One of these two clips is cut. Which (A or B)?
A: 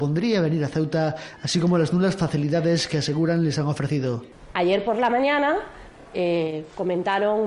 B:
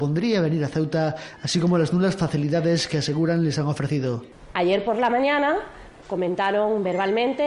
B